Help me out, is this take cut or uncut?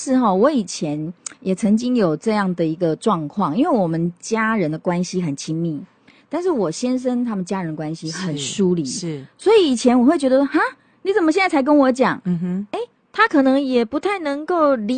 uncut